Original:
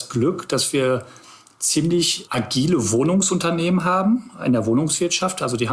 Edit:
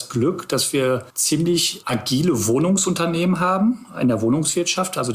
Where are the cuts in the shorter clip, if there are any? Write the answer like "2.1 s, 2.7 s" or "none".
1.1 s